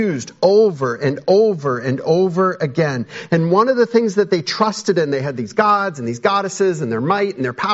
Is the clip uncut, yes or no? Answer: yes